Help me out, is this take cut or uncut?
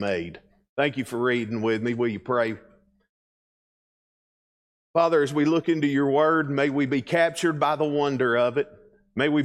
uncut